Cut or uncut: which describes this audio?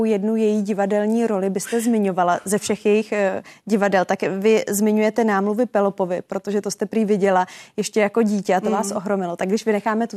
uncut